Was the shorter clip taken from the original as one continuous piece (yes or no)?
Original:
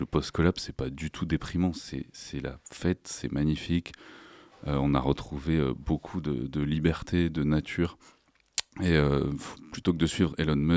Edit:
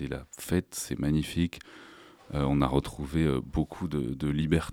yes